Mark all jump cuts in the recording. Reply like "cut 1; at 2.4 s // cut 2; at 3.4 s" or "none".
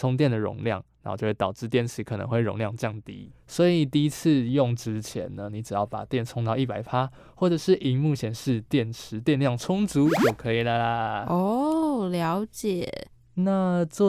none